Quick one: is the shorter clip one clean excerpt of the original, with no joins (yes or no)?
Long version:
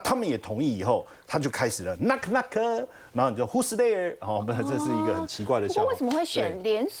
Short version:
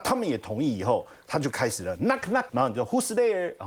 no